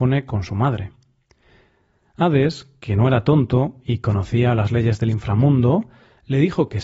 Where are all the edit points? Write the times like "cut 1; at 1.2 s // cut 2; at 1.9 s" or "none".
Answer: none